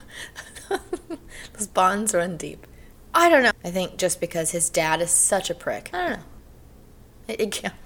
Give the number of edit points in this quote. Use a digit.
2